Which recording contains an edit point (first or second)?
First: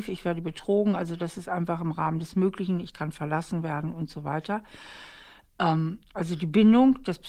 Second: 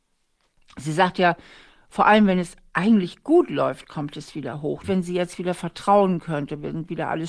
second